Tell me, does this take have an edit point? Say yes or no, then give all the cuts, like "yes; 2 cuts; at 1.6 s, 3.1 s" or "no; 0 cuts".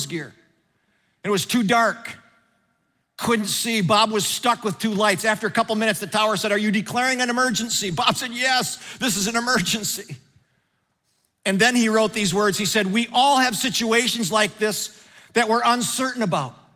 no; 0 cuts